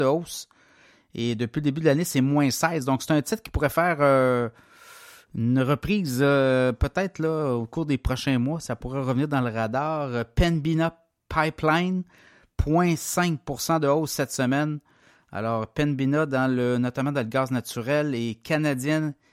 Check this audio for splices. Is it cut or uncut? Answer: uncut